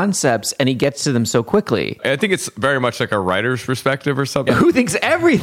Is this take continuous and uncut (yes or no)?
no